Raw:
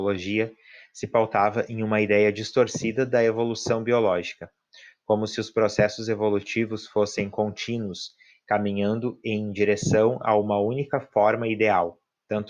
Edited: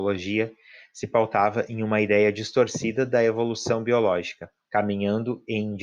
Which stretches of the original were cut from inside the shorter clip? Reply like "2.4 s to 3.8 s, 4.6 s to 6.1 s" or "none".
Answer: 4.7 s to 8.4 s